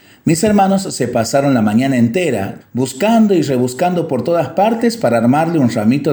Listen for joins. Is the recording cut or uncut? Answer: cut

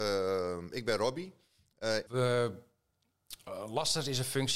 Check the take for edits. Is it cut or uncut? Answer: cut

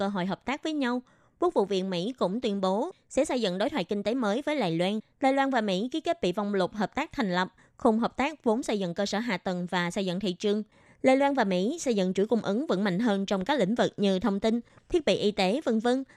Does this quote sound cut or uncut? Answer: cut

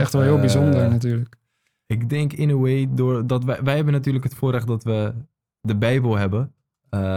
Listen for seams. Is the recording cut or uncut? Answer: uncut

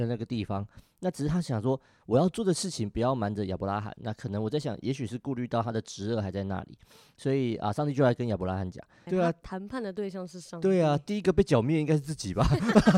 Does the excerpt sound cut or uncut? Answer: cut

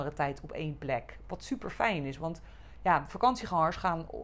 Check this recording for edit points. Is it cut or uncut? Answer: uncut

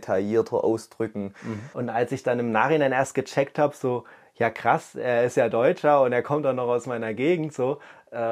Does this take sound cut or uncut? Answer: cut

